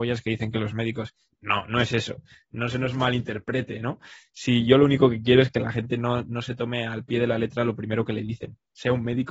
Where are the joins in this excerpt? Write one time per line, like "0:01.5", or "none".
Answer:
none